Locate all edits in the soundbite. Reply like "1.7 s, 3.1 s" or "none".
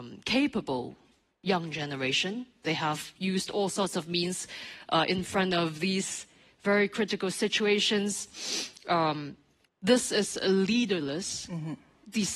9.6 s

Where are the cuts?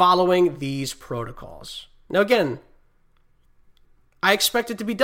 none

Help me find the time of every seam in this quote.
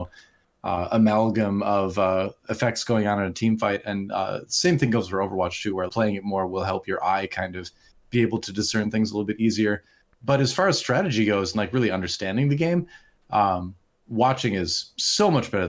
5.9 s

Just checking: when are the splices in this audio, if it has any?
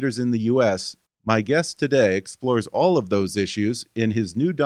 1.0 s

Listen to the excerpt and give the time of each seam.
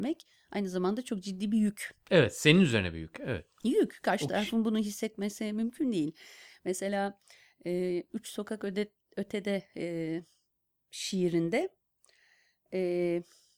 none

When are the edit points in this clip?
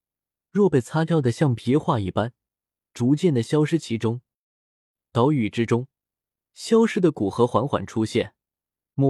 none

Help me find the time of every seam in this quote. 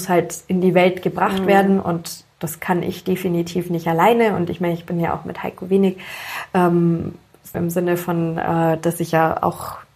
7.5 s

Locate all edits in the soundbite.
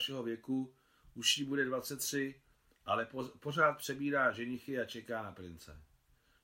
none

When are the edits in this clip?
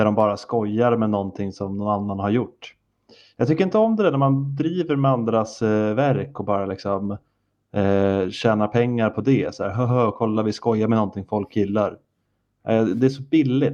none

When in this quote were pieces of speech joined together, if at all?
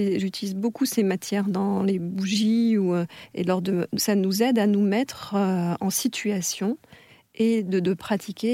4.0 s

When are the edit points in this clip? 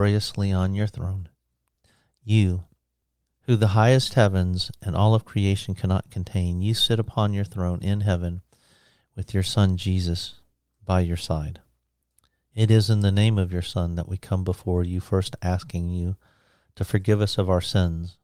none

